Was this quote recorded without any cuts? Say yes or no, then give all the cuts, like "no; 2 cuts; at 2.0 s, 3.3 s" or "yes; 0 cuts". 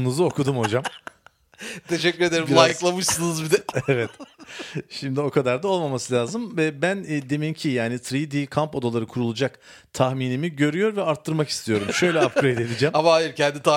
yes; 0 cuts